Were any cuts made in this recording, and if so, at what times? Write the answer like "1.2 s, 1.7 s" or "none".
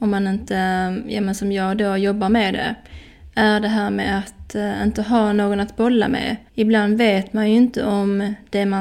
6.5 s